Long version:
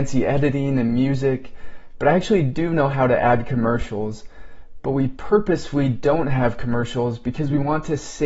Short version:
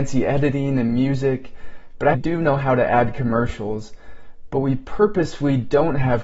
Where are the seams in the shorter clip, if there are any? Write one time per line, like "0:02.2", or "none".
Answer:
0:02.1